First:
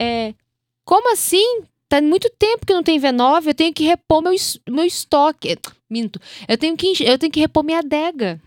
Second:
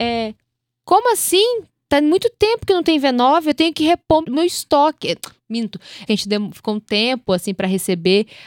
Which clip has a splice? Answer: second; 2 cuts; at 4.2 s, 6.1 s

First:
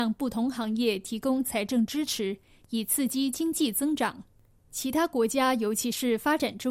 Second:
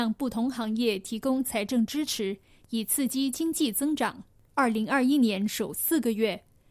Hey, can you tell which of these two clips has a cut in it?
second; 1 cut; at 4.5 s

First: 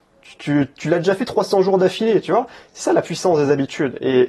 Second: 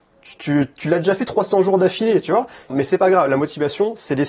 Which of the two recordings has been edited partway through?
second; 1 cut; at 2.7 s

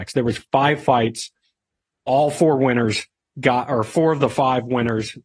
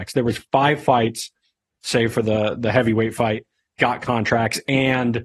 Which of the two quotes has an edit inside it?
second; 1 cut; at 1.8 s

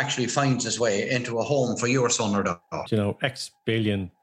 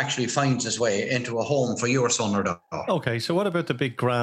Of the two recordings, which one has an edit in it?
first; 1 cut; at 2.9 s

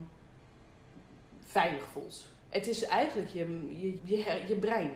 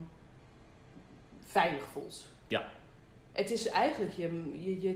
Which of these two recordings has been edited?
first; 2 cuts; at 2.4 s, 4.0 s

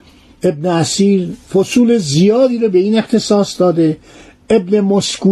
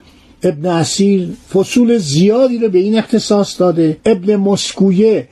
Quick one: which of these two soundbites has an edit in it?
second; 1 cut; at 4.0 s

